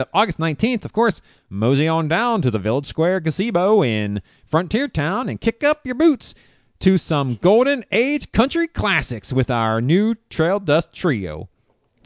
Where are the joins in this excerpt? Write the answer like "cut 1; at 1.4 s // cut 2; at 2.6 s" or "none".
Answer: none